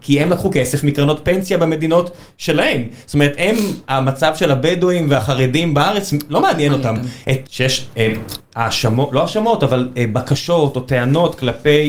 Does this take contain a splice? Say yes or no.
yes